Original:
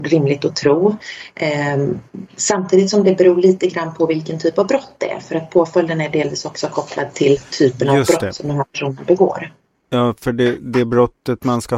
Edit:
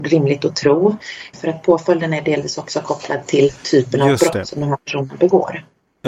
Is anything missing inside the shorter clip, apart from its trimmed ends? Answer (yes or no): yes